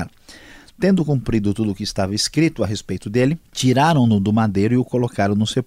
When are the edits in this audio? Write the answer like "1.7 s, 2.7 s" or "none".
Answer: 3.5 s